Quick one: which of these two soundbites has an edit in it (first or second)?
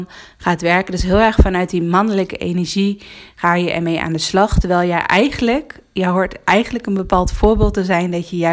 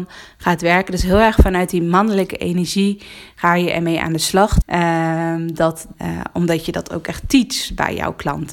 second